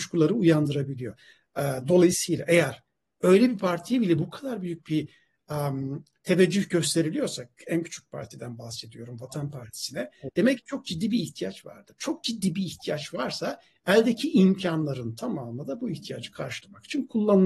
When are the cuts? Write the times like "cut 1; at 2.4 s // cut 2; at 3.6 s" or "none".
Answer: none